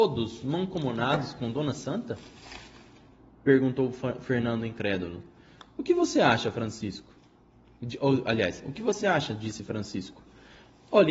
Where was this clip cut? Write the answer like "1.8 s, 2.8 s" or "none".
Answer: none